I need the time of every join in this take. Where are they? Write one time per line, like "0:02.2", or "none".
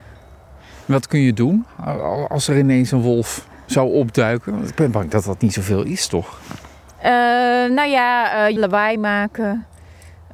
0:08.6